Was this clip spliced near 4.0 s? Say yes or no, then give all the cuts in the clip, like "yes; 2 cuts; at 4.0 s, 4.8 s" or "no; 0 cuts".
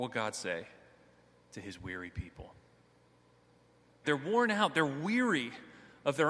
yes; 1 cut; at 4.0 s